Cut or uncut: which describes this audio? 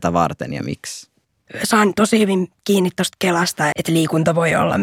cut